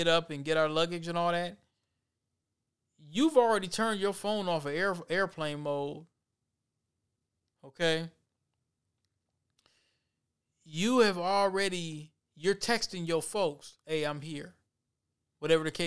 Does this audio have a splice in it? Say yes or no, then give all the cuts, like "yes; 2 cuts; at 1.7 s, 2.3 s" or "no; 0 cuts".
no; 0 cuts